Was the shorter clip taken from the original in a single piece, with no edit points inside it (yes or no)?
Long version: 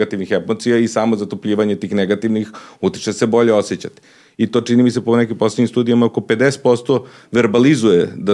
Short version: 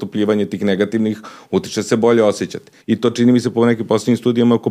no